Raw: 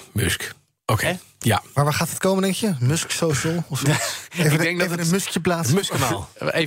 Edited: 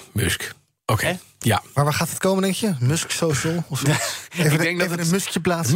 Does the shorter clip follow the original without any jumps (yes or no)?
yes